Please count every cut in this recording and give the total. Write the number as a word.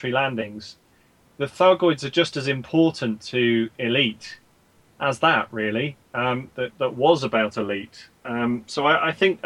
one